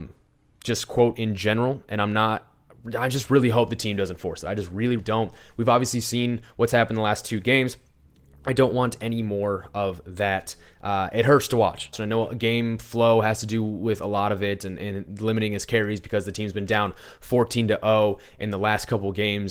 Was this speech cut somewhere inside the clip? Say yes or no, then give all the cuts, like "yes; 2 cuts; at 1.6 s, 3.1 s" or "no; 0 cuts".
yes; 2 cuts; at 5.0 s, 11.9 s